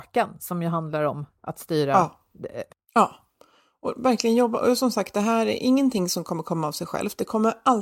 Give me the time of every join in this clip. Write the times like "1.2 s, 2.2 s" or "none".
2.7 s